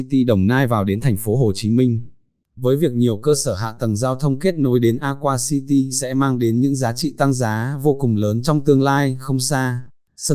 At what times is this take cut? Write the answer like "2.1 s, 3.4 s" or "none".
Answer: none